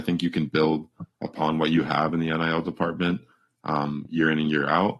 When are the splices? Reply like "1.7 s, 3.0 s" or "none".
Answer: none